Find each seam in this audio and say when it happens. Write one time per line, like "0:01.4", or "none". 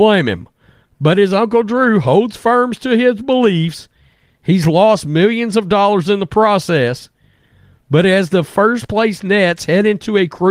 none